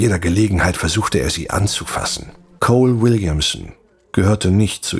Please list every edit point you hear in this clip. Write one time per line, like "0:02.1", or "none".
0:02.6

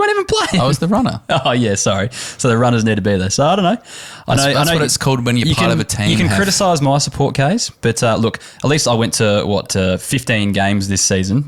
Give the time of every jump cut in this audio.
none

